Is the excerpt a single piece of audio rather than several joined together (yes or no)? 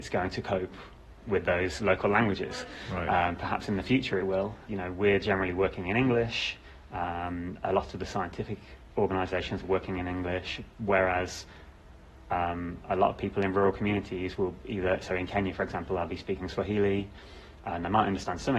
no